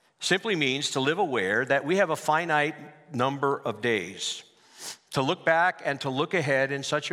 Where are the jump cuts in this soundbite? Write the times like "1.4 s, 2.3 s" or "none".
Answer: none